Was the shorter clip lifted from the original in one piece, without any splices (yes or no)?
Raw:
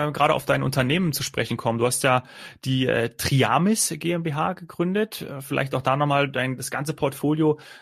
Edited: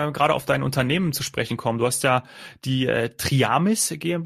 yes